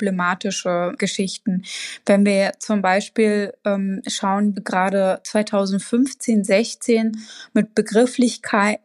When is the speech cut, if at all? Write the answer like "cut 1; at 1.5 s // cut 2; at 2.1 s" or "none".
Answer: cut 1; at 4.5 s